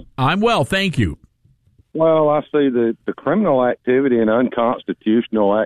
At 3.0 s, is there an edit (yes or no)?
yes